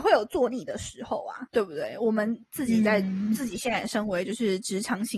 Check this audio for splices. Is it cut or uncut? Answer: uncut